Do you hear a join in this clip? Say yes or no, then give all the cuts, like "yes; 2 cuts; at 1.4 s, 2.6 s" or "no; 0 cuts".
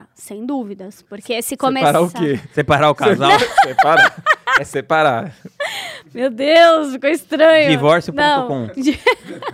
no; 0 cuts